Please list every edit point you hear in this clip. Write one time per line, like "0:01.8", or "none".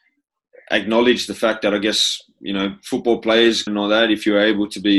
0:03.7